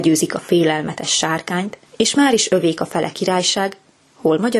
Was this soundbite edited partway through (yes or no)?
yes